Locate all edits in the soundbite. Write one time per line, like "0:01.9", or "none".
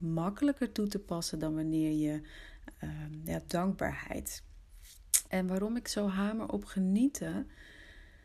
0:02.7
0:05.3

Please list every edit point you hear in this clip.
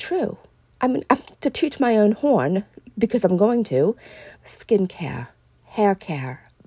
0:04.3

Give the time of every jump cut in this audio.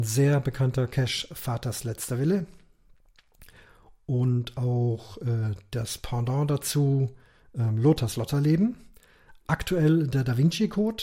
none

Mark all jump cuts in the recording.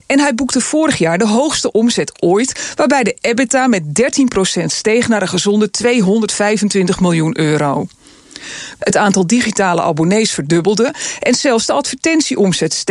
0:08.8

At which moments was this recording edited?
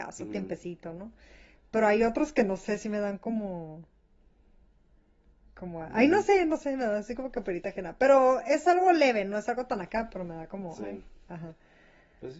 none

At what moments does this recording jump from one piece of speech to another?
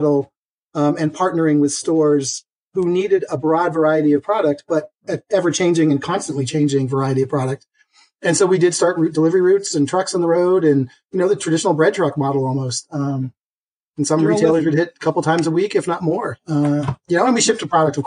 none

